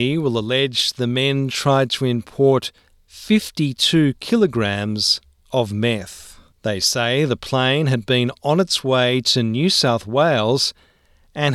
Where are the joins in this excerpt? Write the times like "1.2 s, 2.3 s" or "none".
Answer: 6.5 s